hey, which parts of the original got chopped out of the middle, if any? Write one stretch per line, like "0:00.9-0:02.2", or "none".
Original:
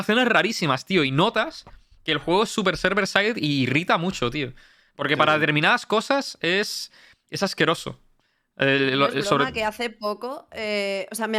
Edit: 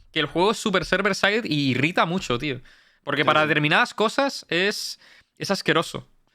none